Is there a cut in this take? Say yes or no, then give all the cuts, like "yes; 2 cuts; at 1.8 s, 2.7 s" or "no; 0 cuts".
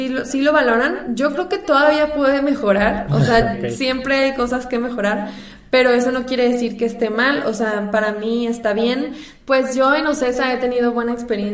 yes; 1 cut; at 9.4 s